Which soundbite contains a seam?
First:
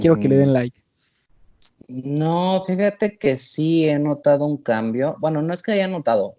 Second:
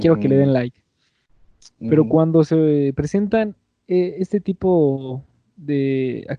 first; 1 cut; at 1.8 s

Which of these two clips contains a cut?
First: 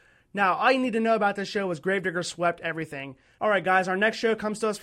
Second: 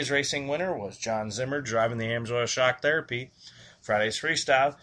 first; 1 cut; at 3.4 s

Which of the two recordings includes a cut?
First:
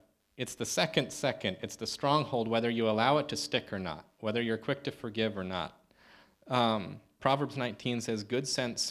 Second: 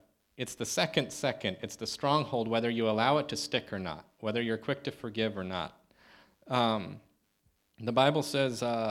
first; 1 cut; at 7.2 s

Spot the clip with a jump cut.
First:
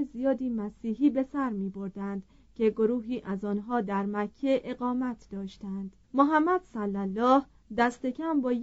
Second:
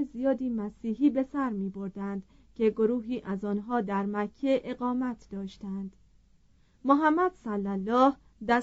first; 1 cut; at 6.0 s

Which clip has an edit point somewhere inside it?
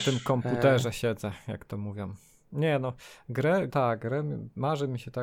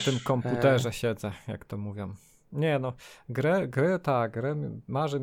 first; 1 cut; at 3.7 s

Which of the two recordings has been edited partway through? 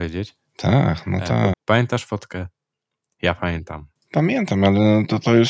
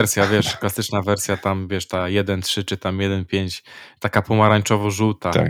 first; 1 cut; at 1.5 s

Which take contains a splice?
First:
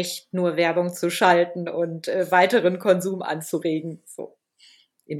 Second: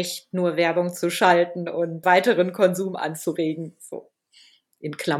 second; 1 cut; at 2.0 s

